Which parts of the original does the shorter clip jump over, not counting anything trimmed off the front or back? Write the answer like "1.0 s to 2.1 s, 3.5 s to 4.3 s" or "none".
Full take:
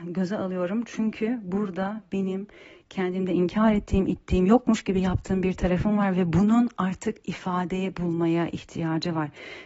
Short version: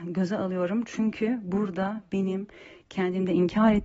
none